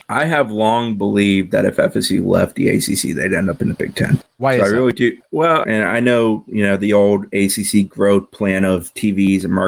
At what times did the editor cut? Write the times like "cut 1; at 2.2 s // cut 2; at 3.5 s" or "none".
cut 1; at 5.6 s